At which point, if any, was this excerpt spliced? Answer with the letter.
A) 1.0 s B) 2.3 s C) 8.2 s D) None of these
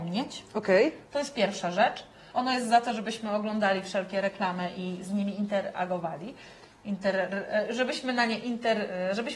B